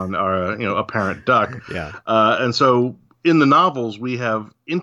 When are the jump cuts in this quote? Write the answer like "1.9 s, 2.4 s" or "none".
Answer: none